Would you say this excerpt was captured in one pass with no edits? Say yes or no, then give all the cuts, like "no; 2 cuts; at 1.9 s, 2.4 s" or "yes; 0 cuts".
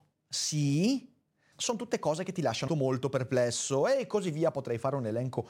no; 2 cuts; at 1.5 s, 2.7 s